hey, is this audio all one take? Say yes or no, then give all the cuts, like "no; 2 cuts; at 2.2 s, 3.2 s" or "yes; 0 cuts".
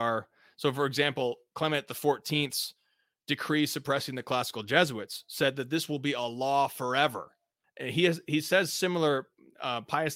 no; 1 cut; at 7.6 s